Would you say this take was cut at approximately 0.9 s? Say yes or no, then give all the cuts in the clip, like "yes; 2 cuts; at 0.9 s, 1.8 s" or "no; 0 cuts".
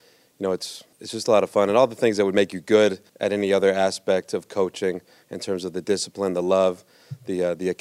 yes; 2 cuts; at 0.9 s, 3.1 s